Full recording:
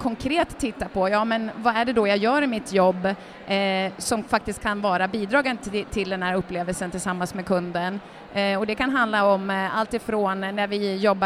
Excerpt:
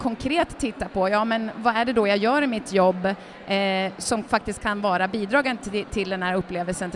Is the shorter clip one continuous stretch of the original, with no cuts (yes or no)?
yes